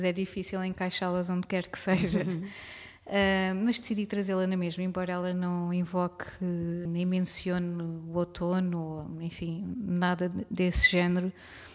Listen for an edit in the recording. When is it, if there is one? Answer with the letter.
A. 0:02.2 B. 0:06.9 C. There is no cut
B